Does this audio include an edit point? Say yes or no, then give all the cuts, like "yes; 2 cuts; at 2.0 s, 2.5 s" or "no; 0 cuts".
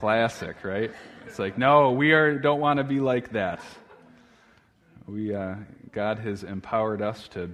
no; 0 cuts